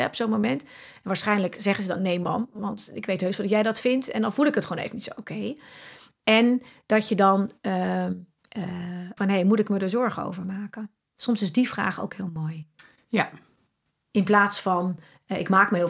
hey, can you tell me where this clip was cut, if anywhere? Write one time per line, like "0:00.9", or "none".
0:09.2